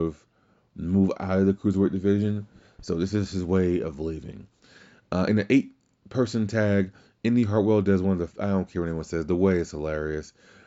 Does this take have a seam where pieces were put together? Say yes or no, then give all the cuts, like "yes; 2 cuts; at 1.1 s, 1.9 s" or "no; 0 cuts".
no; 0 cuts